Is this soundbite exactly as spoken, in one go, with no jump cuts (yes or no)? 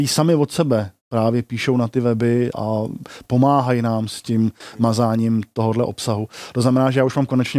no